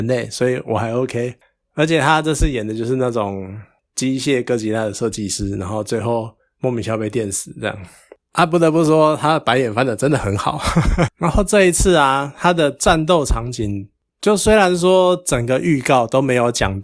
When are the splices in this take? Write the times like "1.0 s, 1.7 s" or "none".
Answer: 11.1 s

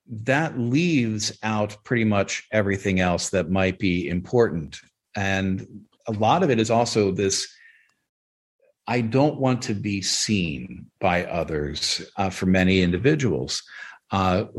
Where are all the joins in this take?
5.9 s

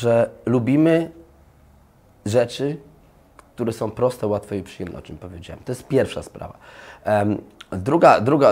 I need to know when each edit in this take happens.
none

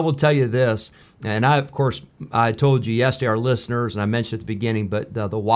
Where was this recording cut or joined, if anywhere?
none

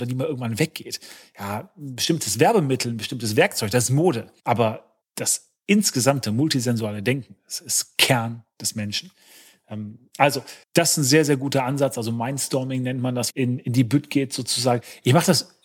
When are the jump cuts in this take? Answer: 10.6 s, 13.3 s

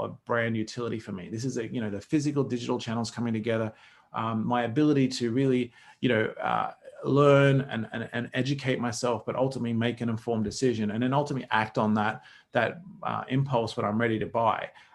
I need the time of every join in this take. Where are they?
none

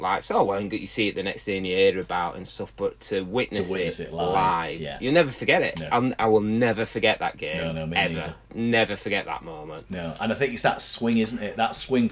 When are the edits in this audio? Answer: none

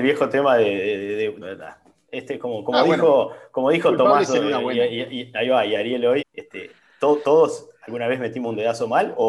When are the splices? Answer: 1.4 s, 6.2 s

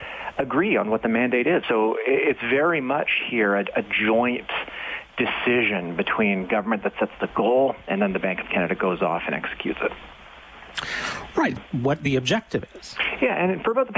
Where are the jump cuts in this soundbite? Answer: 1.6 s, 11.6 s

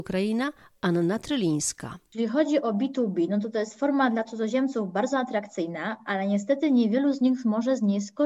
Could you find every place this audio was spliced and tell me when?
none

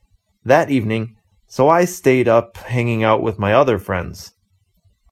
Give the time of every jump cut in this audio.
1.3 s

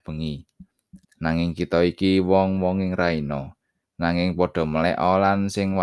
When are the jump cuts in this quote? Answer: 1.0 s, 3.8 s

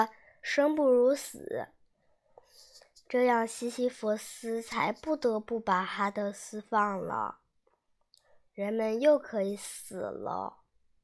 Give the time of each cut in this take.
none

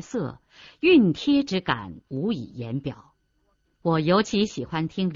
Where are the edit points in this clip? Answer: 3.6 s

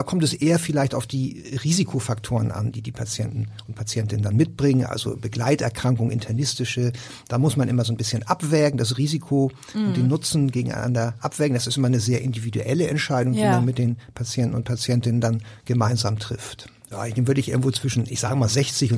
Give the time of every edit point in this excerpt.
16.9 s

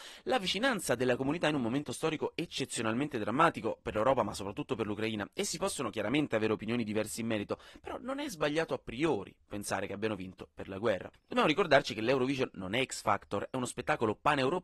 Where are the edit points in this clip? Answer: 11.1 s

